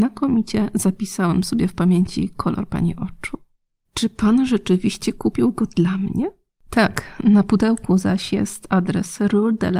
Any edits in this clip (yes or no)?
no